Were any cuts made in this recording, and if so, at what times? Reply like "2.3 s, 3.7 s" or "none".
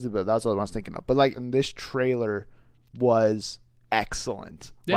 1.3 s